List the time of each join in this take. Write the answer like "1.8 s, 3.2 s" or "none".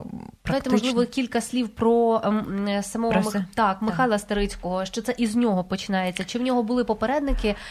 none